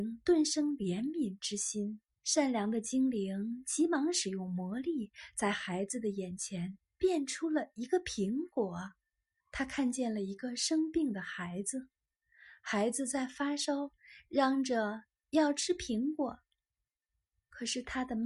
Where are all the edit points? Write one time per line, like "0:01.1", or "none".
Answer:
0:02.1
0:09.4